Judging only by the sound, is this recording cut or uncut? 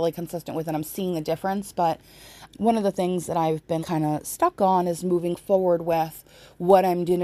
cut